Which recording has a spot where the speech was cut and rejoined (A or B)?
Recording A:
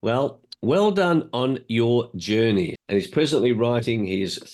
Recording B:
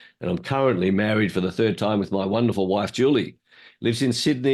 A